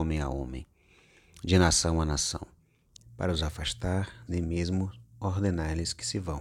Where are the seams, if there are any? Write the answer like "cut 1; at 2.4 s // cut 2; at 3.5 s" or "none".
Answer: cut 1; at 3.0 s // cut 2; at 4.3 s